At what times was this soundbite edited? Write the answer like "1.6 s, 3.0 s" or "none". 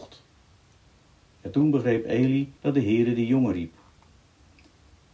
1.3 s, 2.6 s